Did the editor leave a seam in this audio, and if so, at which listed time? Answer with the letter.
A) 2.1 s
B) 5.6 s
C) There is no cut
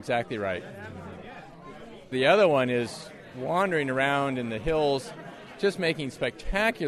A